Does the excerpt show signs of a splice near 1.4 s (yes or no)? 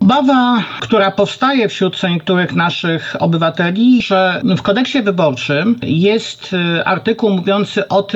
no